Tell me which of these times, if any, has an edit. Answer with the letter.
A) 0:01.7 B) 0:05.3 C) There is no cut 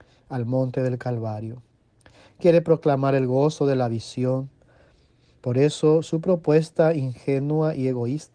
C